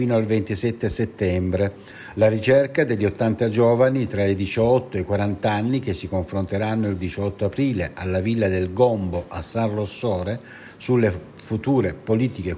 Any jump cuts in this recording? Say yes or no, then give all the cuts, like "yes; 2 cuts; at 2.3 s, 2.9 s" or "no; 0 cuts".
no; 0 cuts